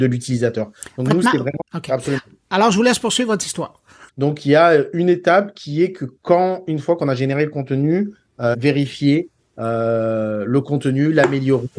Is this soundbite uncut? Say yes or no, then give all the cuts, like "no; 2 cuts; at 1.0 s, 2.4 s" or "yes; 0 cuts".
no; 3 cuts; at 1.6 s, 4.1 s, 8.5 s